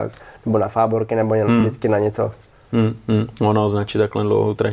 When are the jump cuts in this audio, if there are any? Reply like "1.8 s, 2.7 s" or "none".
none